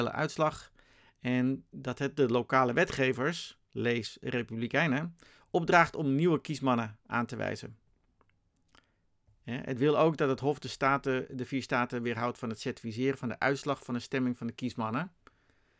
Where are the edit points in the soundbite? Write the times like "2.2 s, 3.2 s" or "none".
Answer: none

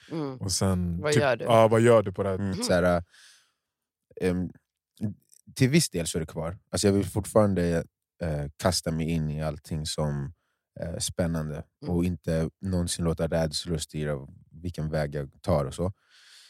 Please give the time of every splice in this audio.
2.5 s

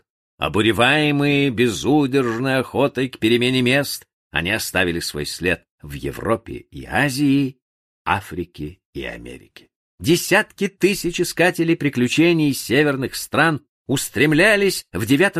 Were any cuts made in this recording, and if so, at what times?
9.9 s

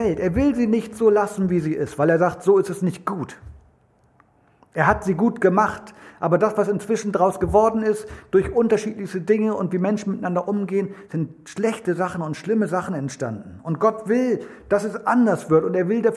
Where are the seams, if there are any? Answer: none

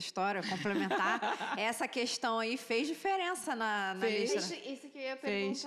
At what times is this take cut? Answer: none

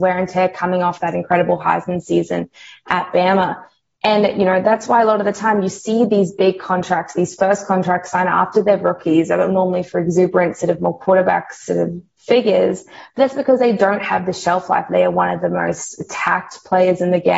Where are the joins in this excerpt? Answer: none

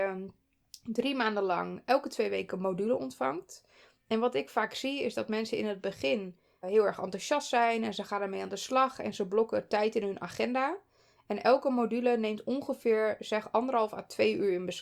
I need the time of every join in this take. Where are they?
6.6 s

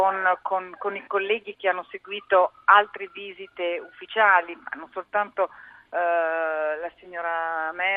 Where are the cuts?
none

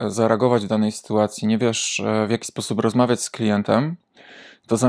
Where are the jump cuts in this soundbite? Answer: none

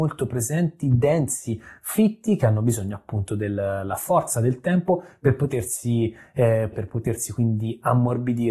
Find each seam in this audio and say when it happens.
6.7 s

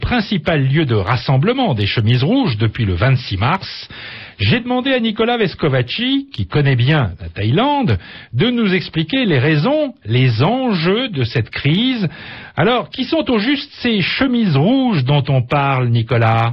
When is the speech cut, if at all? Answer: none

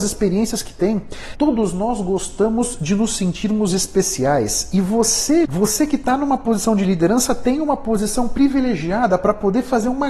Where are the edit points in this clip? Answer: 1.3 s, 5.4 s

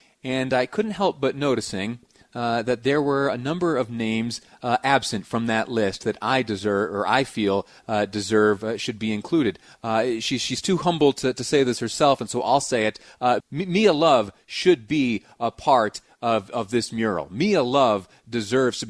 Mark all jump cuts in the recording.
13.4 s

